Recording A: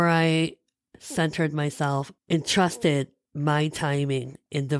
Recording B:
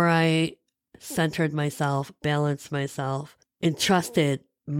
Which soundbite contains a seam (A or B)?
A